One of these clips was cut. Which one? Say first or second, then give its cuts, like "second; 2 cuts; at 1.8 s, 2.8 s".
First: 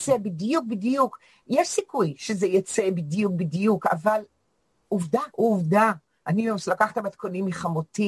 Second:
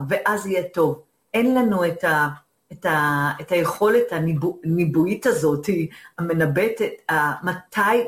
first; 1 cut; at 5.3 s